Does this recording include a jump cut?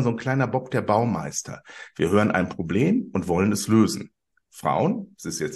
no; 0 cuts

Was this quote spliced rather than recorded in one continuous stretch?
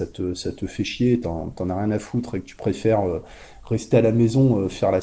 no; 0 cuts

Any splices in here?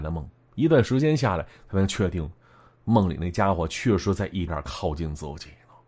yes; 1 cut; at 4.5 s

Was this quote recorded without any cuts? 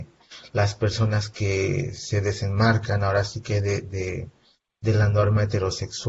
yes; 0 cuts

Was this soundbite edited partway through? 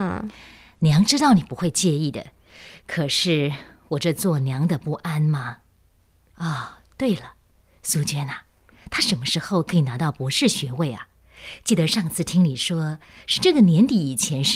no; 0 cuts

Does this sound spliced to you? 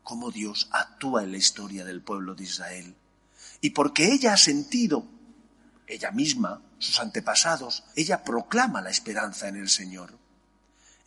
yes; 2 cuts; at 6.8 s, 7.9 s

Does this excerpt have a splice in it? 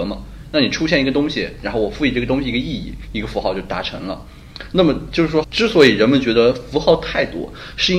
yes; 1 cut; at 5.4 s

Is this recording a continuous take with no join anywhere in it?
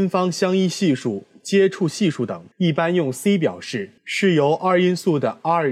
no; 2 cuts; at 2.5 s, 4.0 s

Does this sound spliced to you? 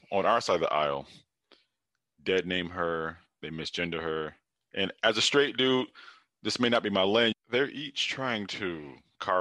yes; 1 cut; at 7.3 s

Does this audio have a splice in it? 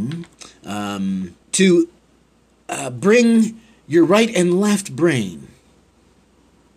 yes; 1 cut; at 1.4 s

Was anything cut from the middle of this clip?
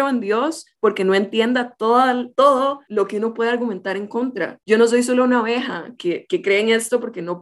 yes; 1 cut; at 6.0 s

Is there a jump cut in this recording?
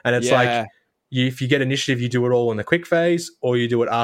no; 0 cuts

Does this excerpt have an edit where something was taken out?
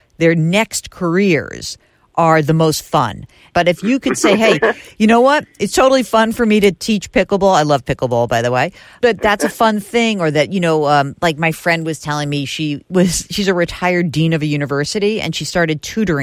no; 0 cuts

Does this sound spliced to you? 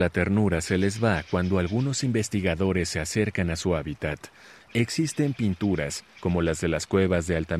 yes; 1 cut; at 4.6 s

